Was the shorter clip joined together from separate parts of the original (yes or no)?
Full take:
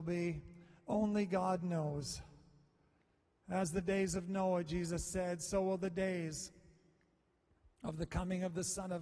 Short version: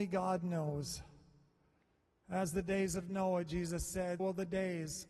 yes